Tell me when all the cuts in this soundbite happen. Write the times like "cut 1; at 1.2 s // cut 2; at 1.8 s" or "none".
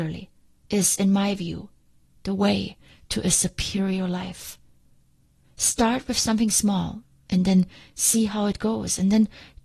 none